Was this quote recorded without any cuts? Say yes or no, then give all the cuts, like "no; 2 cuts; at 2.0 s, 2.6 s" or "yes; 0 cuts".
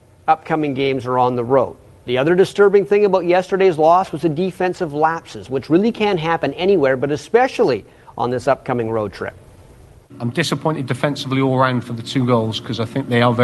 yes; 0 cuts